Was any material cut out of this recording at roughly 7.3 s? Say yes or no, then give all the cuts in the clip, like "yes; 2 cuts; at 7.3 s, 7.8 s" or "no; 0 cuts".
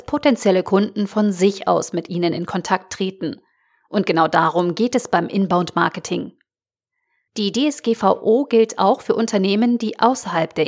yes; 1 cut; at 7.3 s